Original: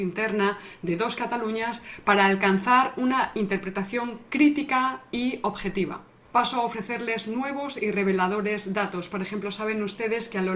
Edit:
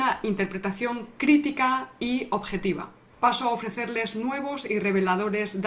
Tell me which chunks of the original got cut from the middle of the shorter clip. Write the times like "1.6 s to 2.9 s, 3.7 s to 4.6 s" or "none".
none